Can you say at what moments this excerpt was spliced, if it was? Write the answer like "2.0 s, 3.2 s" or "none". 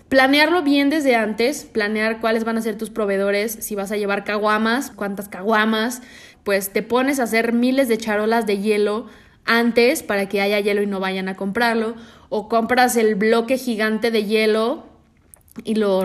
4.9 s, 6.3 s